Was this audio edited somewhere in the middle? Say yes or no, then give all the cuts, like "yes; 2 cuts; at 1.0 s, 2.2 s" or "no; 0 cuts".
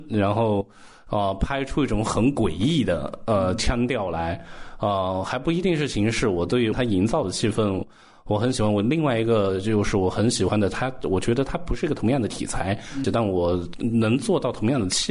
yes; 1 cut; at 13.0 s